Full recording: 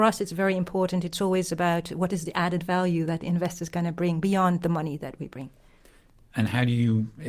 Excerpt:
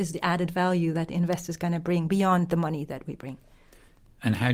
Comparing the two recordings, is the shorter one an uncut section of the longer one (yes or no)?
yes